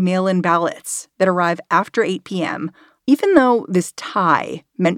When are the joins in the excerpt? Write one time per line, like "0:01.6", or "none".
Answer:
0:03.0